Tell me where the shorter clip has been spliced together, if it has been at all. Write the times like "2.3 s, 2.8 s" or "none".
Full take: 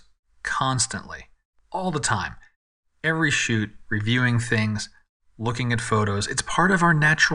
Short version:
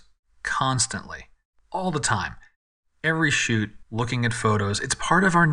3.8 s

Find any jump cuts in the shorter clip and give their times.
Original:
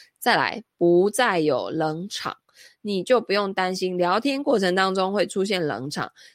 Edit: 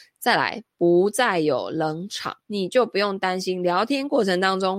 2.4 s

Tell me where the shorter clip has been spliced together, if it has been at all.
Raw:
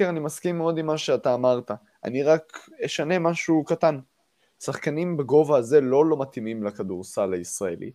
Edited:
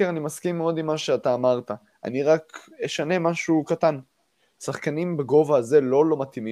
none

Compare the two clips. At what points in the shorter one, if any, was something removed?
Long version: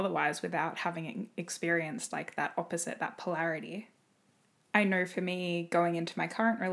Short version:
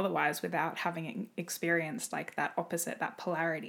none

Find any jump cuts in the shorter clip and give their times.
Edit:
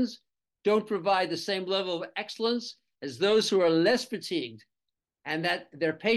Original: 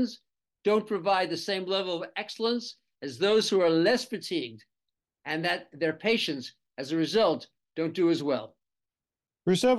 none

